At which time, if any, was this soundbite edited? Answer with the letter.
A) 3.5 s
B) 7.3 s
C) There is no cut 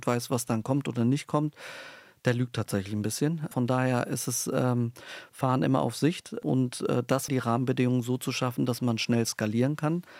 B